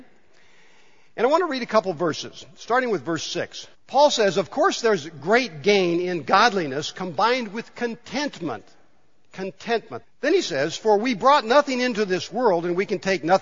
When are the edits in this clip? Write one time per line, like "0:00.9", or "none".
0:03.7
0:10.0